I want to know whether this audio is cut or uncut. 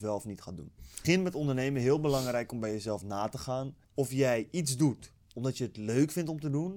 cut